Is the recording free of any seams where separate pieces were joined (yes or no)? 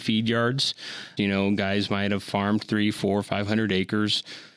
no